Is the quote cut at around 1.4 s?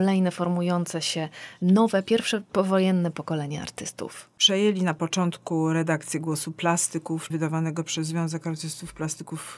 no; 2 cuts; at 4.4 s, 7.3 s

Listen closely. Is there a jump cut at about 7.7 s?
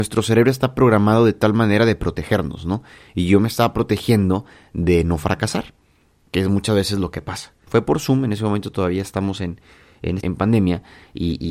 yes; 2 cuts; at 7.7 s, 10.2 s

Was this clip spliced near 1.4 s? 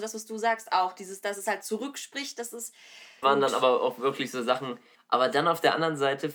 no; 2 cuts; at 3.2 s, 4.9 s

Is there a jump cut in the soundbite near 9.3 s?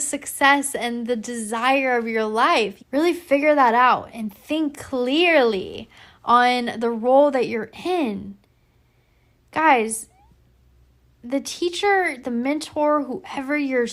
no; 1 cut; at 2.8 s

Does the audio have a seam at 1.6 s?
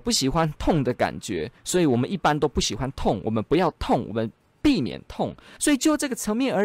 no; 1 cut; at 5.6 s

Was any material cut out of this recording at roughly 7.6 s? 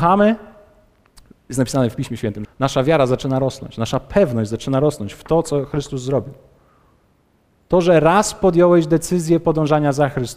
yes; 2 cuts; at 2.4 s, 7.6 s

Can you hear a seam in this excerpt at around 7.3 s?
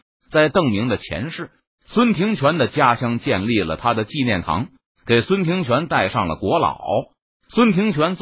yes; 1 cut; at 7.3 s

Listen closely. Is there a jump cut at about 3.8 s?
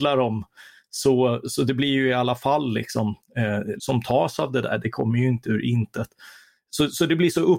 yes; 1 cut; at 3.8 s

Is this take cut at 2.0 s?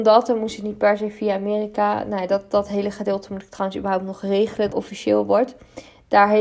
no; 1 cut; at 4.7 s

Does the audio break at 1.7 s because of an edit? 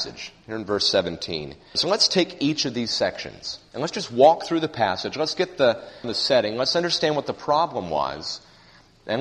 yes; 2 cuts; at 1.7 s, 6.0 s

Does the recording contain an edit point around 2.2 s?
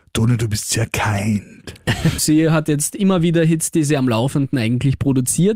yes; 1 cut; at 2.2 s

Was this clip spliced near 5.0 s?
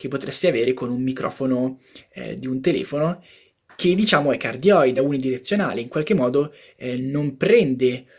yes; 1 cut; at 5.0 s

